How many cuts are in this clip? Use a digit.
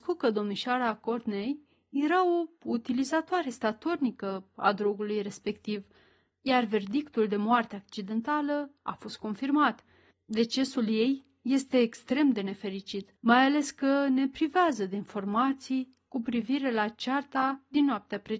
2